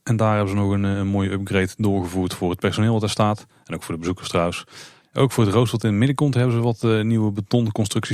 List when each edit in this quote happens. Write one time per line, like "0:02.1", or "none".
0:05.0

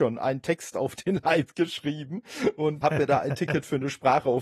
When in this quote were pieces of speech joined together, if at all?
0:02.8

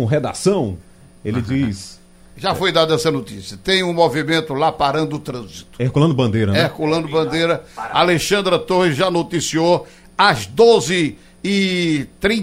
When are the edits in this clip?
none

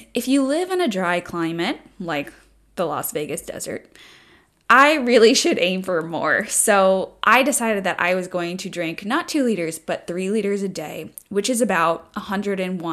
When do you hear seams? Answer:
none

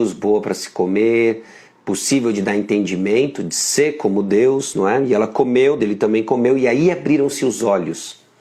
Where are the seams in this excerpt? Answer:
0:05.8

